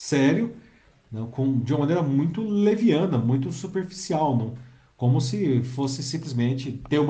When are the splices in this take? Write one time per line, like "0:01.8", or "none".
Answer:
none